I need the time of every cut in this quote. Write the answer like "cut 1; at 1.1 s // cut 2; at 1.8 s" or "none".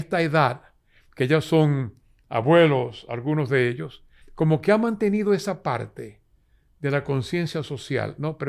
cut 1; at 4.2 s